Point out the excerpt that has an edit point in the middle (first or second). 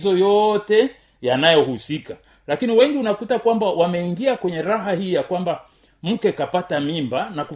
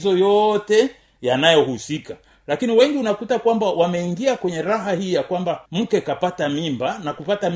second